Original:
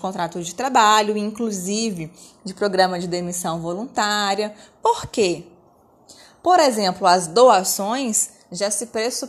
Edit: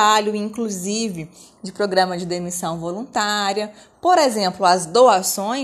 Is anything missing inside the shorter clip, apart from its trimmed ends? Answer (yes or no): yes